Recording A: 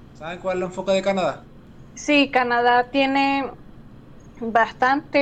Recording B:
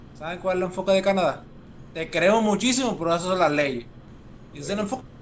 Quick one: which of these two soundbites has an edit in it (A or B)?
B